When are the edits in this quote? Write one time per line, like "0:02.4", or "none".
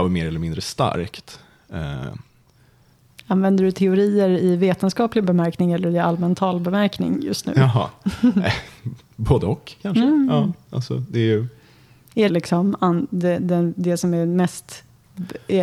0:12.3